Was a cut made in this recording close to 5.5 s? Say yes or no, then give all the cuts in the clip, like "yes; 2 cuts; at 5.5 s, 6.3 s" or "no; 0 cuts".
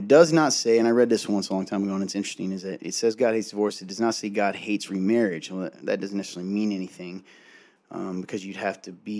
no; 0 cuts